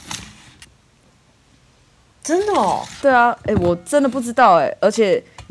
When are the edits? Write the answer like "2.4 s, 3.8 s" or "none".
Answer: 3.0 s